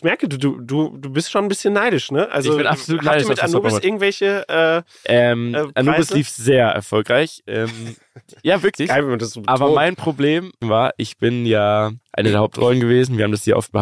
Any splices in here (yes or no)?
yes